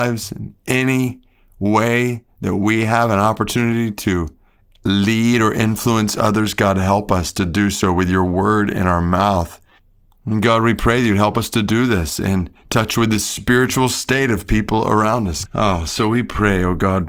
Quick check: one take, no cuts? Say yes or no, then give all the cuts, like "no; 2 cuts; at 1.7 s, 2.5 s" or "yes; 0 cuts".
no; 1 cut; at 15.5 s